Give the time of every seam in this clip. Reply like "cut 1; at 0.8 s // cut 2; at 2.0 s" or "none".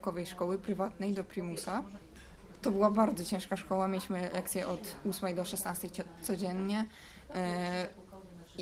none